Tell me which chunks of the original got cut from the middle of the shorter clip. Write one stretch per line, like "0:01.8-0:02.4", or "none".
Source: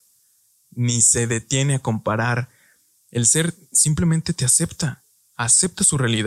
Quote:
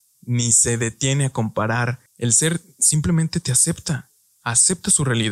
0:02.6-0:03.0